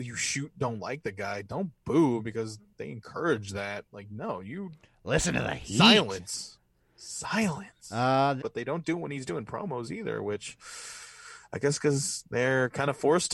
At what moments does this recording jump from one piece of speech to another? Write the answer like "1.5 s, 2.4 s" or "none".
8.4 s